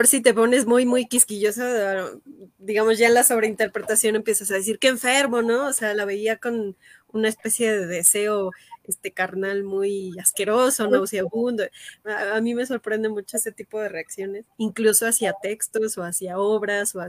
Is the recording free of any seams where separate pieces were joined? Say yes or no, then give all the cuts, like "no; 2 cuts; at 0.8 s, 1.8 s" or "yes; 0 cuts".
no; 2 cuts; at 12.0 s, 14.5 s